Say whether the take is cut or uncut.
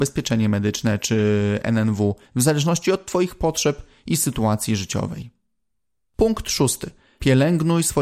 cut